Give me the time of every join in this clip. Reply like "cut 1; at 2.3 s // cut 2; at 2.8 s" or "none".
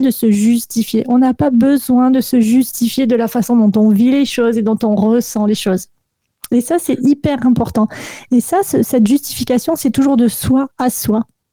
none